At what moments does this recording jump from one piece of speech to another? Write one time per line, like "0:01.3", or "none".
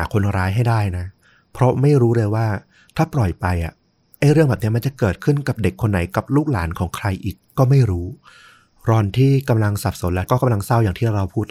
none

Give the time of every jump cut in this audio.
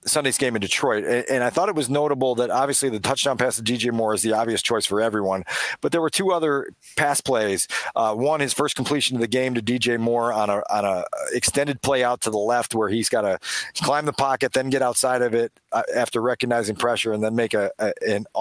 none

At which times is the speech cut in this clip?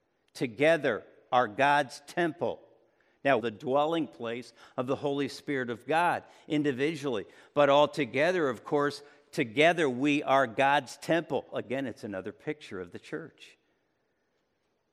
0:03.4
0:11.5

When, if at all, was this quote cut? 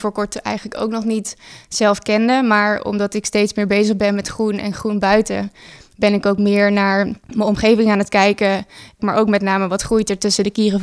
0:07.2
0:09.0

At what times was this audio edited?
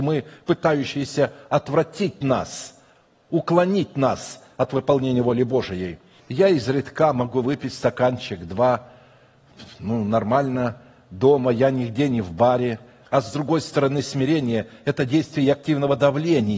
0:06.2
0:13.0

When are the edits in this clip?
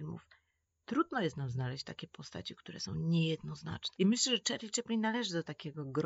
0:04.0

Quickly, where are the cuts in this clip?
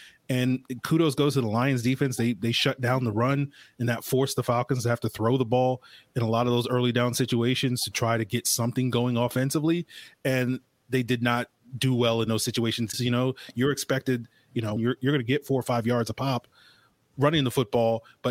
0:12.9
0:14.8

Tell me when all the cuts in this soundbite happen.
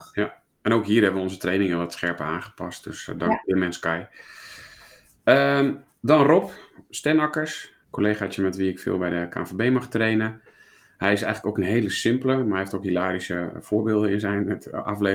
0:07.8

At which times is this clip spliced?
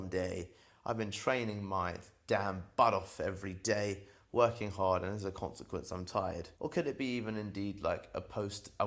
0:06.6

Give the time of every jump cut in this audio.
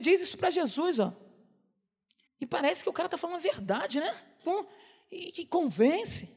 0:02.3
0:04.4

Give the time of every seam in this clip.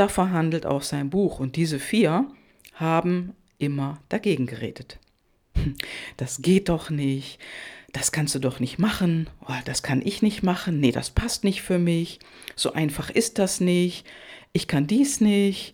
none

